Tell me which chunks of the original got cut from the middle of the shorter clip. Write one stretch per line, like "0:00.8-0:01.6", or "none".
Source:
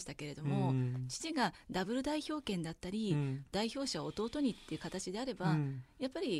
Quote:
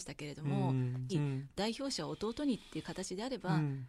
0:01.1-0:03.1